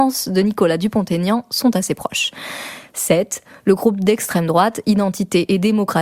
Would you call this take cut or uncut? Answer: uncut